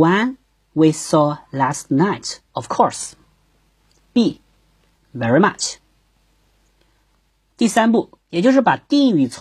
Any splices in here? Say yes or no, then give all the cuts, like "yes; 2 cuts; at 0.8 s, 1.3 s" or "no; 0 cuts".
yes; 2 cuts; at 4.9 s, 8.2 s